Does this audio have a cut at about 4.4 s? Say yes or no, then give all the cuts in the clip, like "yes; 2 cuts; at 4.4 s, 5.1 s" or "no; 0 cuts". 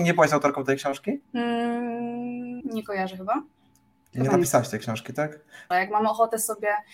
no; 3 cuts; at 1.2 s, 2.6 s, 5.7 s